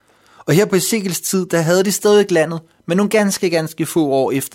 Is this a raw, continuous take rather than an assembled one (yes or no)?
yes